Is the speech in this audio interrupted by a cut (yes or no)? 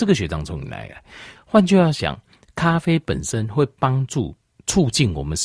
yes